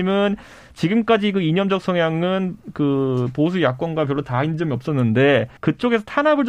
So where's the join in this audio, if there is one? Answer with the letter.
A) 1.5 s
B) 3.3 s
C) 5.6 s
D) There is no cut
C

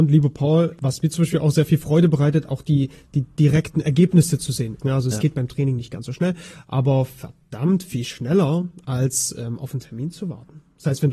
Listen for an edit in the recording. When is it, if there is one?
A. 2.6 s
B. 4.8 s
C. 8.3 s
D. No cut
B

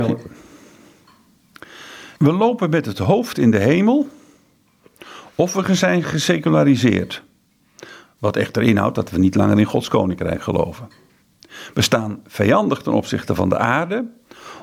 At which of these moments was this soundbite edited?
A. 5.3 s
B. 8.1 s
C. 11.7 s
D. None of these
D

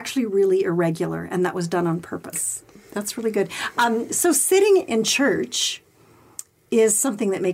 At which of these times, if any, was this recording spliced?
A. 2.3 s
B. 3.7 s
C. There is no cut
A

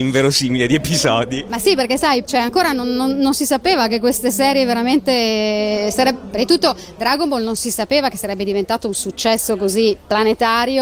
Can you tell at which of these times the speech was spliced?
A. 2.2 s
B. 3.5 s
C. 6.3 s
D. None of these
A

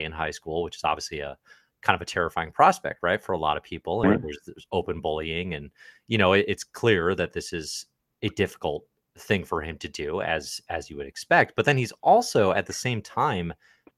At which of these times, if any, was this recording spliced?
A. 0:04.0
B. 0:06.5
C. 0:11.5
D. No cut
A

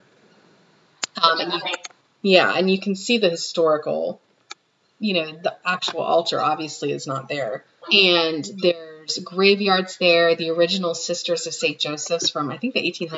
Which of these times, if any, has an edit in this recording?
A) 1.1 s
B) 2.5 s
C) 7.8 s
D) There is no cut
C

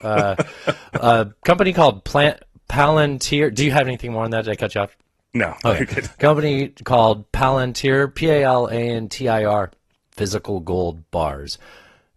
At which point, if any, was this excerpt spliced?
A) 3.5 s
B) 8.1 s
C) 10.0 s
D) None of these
C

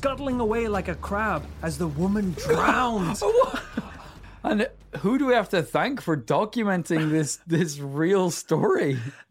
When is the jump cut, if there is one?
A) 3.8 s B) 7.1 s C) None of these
C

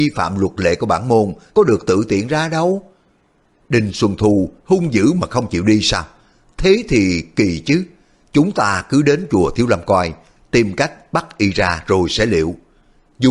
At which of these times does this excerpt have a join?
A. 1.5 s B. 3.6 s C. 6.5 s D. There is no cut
A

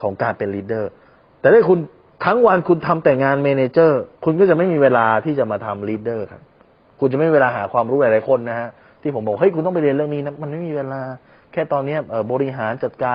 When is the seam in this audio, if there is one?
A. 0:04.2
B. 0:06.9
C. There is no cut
A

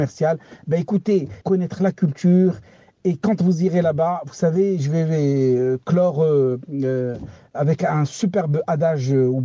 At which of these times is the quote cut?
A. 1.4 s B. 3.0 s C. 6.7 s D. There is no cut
A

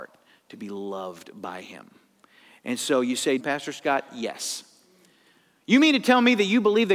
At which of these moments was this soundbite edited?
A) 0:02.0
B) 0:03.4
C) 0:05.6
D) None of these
B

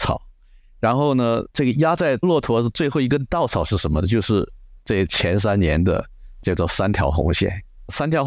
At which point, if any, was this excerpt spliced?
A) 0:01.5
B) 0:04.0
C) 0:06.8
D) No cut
A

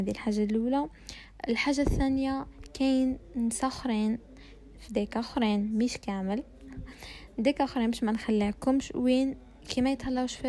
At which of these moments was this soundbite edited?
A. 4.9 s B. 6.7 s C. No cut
A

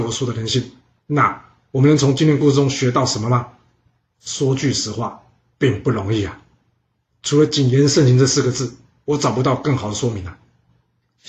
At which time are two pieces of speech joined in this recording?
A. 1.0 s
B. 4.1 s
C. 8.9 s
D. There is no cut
A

